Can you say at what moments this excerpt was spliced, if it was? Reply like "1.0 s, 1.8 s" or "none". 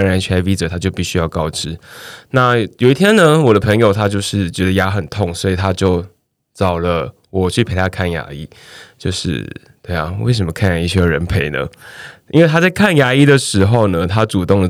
none

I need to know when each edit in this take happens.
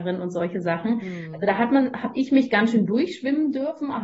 none

